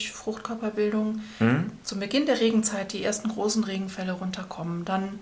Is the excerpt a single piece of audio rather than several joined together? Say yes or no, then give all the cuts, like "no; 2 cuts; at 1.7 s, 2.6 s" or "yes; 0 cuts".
yes; 0 cuts